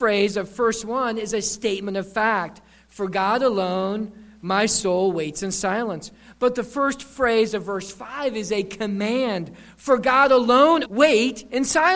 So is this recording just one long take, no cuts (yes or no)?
no